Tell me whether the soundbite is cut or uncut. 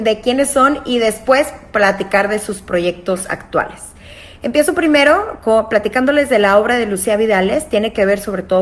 uncut